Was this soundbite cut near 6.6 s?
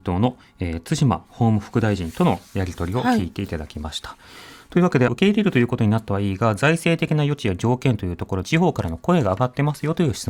no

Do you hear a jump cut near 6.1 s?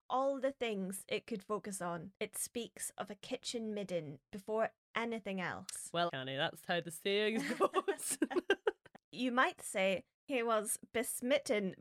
yes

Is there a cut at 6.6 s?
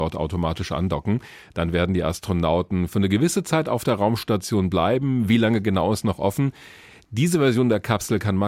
no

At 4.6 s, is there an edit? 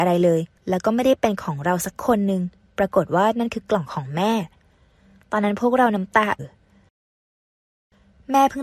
no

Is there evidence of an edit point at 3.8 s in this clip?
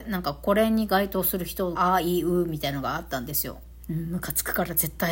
yes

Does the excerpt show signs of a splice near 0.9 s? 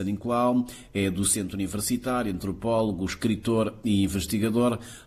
no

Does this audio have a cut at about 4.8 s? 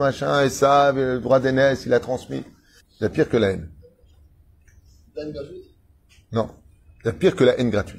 no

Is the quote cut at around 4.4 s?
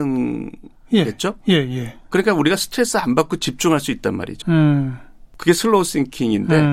yes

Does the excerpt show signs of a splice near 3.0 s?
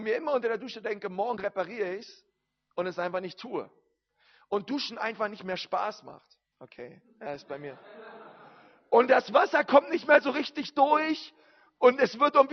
no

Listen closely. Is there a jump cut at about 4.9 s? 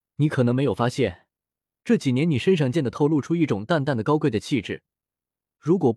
no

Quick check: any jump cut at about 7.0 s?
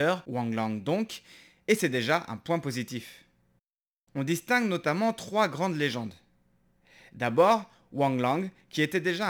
no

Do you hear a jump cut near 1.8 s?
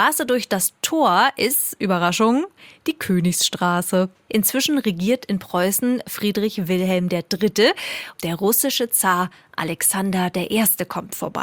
no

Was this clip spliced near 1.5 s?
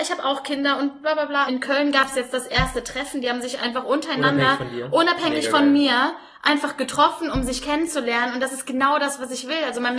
yes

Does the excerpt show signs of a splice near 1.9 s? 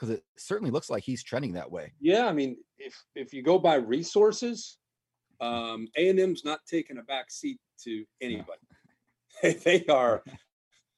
no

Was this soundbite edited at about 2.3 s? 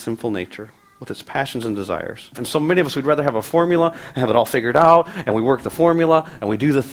yes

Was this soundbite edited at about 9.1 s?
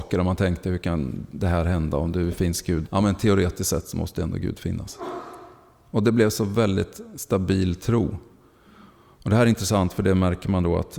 no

